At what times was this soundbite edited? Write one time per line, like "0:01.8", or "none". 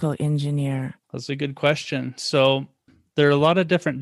0:01.0